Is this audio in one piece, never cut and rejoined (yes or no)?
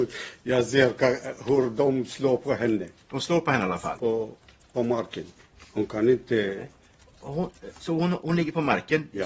no